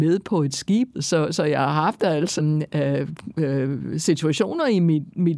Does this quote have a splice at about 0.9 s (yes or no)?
yes